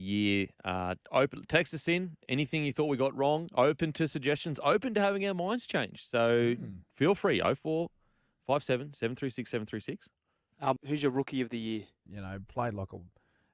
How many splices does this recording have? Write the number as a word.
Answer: two